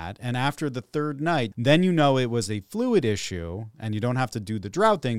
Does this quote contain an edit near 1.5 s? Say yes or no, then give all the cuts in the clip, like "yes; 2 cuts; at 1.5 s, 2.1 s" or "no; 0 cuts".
yes; 1 cut; at 1.5 s